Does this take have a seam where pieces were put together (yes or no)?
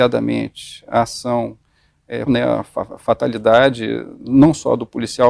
yes